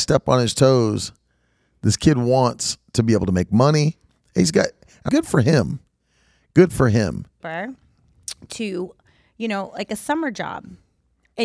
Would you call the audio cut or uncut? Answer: cut